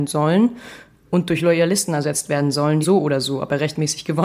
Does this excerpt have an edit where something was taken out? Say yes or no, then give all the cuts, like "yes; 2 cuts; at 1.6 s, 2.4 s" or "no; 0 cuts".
yes; 1 cut; at 2.8 s